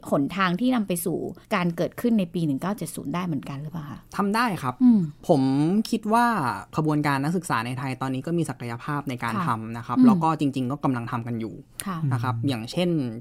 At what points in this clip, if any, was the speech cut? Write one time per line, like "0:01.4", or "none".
0:01.4
0:04.1